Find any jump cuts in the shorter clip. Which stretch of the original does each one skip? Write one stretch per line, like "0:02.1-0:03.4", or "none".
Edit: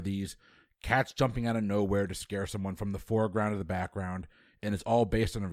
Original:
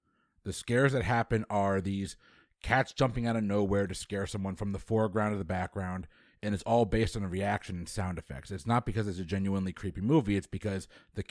none